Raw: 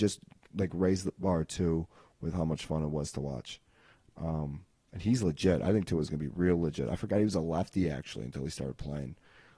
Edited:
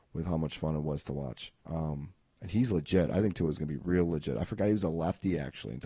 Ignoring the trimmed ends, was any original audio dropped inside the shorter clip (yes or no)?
yes